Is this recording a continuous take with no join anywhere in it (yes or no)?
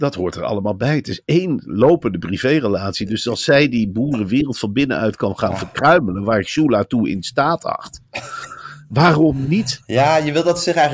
yes